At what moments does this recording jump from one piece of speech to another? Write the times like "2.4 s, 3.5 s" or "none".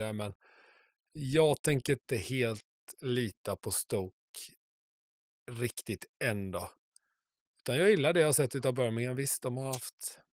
none